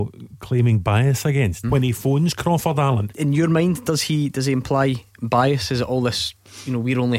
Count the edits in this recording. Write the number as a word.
two